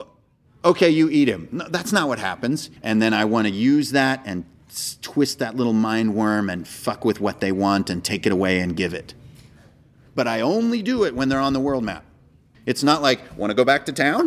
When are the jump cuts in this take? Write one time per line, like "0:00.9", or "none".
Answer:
0:02.8
0:12.5